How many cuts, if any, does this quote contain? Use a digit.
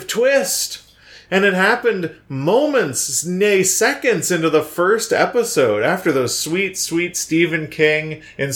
0